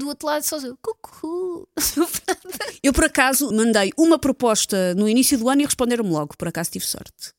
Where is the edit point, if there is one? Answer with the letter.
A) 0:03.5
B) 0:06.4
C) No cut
A